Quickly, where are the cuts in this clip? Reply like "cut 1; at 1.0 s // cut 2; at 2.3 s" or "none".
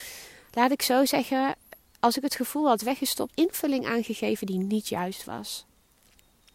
cut 1; at 3.3 s